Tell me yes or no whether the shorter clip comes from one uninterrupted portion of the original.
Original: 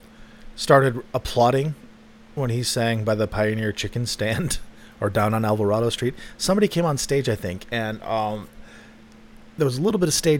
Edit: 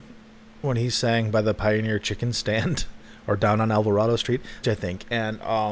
no